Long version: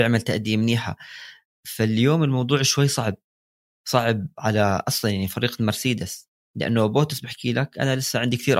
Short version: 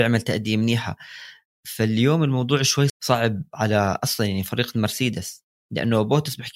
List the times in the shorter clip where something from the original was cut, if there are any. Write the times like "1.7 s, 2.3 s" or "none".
2.9 s